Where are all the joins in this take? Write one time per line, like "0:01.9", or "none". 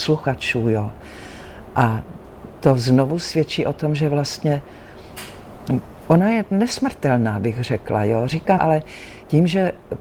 0:08.6